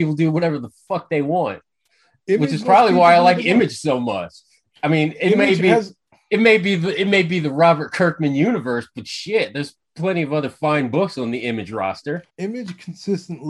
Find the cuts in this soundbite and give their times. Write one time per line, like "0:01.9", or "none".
0:12.3